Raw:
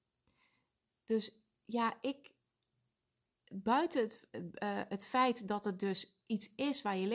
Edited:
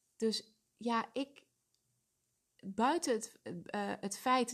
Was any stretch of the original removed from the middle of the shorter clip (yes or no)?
no